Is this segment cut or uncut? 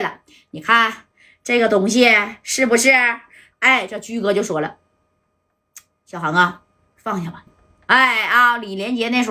cut